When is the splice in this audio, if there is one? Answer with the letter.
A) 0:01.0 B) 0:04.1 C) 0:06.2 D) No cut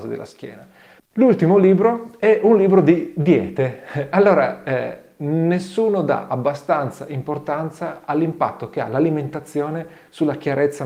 A